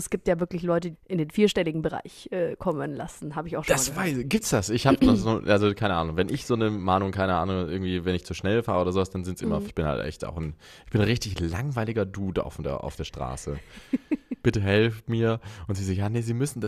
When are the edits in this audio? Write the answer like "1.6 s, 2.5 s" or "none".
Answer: 0.9 s, 9.7 s, 14.4 s